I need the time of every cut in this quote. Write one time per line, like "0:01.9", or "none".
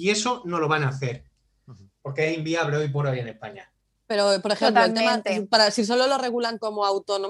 none

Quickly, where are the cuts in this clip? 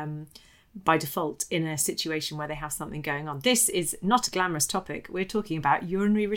none

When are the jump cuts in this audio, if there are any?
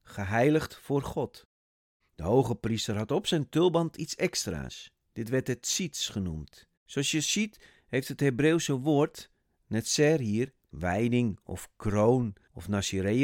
0:02.0
0:06.7
0:10.6

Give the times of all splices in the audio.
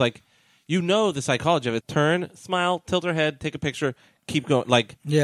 0:01.8

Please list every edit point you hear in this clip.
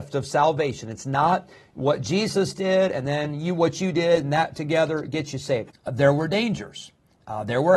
0:05.7

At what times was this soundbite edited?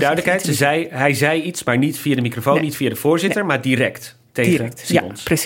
none

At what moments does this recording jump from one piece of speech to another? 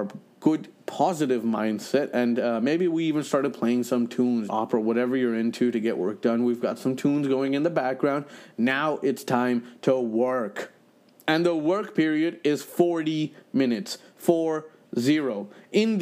0:04.5

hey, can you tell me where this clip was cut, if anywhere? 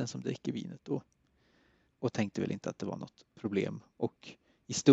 0:01.9
0:03.3

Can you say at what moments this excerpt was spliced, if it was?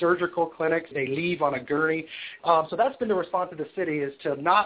0:00.9
0:02.4

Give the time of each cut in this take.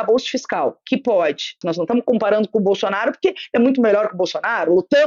0:01.6

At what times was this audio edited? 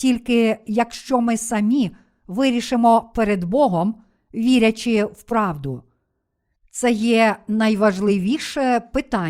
0:06.6

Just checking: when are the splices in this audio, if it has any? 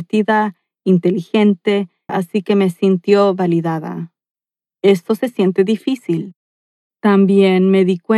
0:02.1

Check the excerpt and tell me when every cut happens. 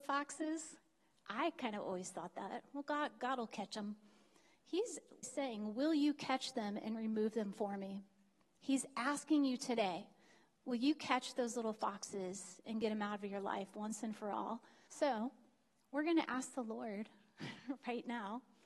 0:05.2
0:14.9

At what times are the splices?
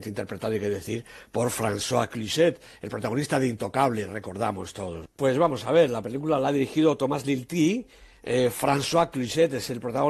0:05.0

